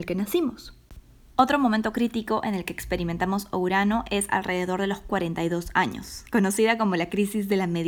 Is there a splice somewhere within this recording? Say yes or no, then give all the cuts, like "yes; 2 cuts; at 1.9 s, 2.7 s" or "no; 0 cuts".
no; 0 cuts